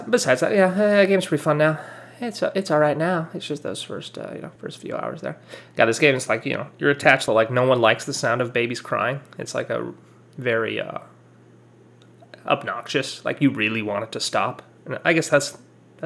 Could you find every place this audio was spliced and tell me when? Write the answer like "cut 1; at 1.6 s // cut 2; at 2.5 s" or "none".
cut 1; at 4.6 s // cut 2; at 7.3 s